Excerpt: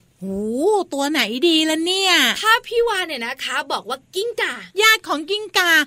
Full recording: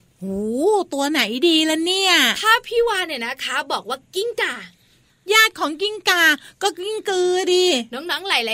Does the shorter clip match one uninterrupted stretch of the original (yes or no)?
no